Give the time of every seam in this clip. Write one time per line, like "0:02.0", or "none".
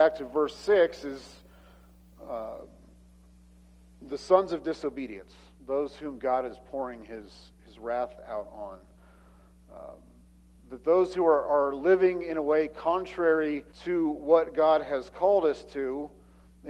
0:13.7